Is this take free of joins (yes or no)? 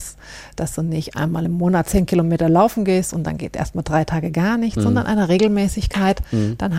yes